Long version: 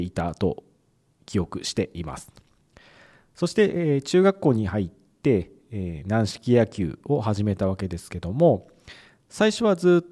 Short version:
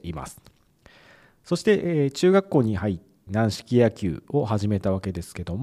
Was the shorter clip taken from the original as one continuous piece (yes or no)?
no